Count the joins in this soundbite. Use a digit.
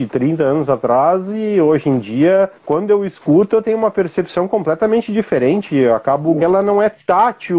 2